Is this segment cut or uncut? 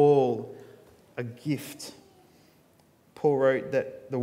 uncut